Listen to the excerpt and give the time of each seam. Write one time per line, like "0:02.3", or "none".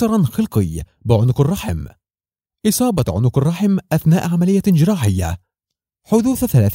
none